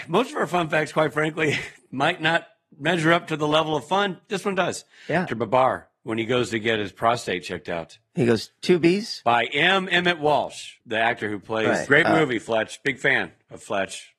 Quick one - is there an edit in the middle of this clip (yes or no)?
yes